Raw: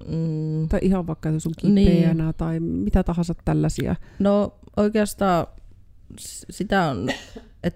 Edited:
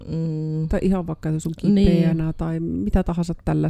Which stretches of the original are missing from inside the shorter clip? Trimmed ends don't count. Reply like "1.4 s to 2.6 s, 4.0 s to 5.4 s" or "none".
none